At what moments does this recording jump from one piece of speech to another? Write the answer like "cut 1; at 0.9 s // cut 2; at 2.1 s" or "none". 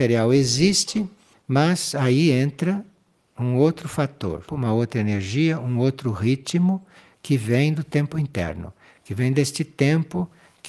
cut 1; at 4.5 s